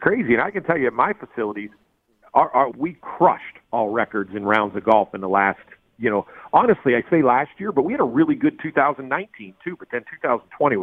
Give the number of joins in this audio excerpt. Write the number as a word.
one